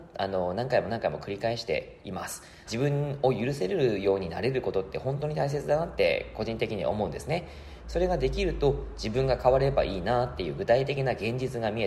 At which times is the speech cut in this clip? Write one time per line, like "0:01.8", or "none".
0:02.7